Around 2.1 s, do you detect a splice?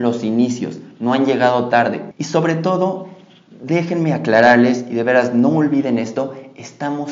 yes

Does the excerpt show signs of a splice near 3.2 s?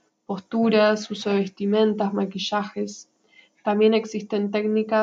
no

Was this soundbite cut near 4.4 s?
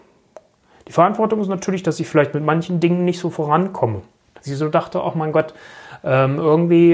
yes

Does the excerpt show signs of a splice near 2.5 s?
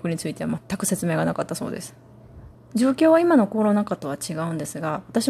yes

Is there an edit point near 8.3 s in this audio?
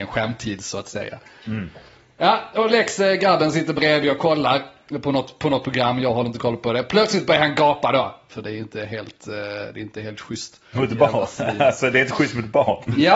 yes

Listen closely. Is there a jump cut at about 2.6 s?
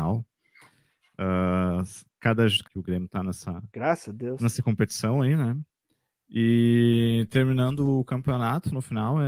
yes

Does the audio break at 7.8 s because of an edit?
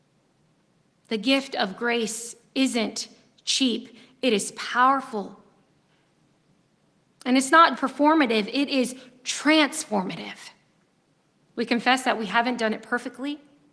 yes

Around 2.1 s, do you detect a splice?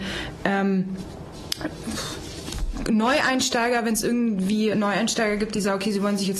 no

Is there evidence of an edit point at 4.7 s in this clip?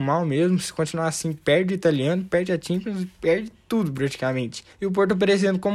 yes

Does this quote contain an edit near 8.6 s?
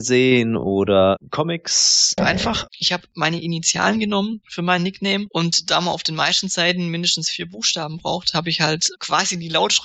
no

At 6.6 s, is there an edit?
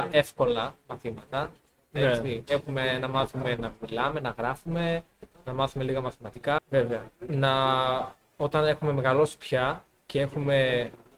yes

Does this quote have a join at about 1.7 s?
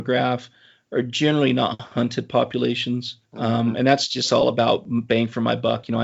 no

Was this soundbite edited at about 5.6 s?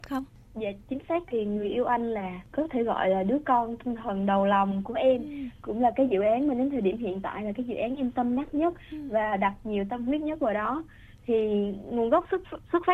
no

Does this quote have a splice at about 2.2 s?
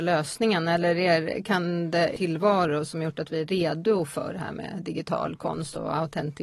yes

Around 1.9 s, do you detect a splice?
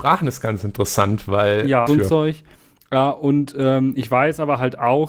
yes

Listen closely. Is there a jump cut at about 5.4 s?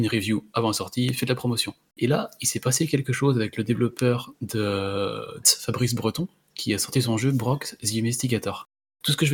yes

